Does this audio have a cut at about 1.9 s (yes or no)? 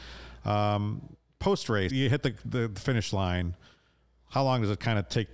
yes